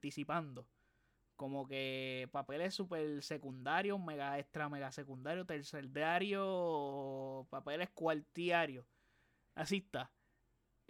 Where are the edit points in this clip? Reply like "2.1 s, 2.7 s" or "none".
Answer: none